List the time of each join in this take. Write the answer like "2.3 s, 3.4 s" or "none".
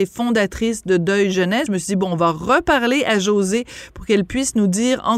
1.7 s